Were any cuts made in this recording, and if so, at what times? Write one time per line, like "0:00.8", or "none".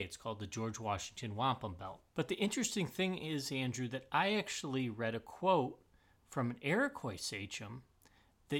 0:02.1